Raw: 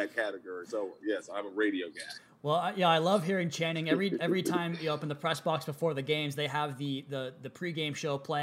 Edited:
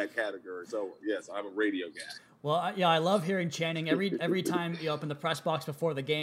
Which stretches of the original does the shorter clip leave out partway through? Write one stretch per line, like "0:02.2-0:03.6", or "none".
none